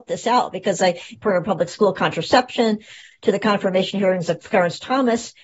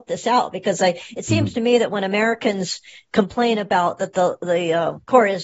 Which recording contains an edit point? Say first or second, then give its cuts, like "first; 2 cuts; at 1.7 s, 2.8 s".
first; 2 cuts; at 1.1 s, 3.1 s